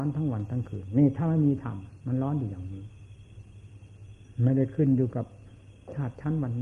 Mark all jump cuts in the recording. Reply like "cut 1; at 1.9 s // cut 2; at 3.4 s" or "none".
none